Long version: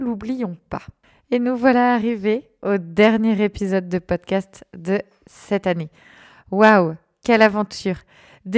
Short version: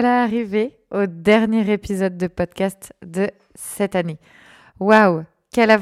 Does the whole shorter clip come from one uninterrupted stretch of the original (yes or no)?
yes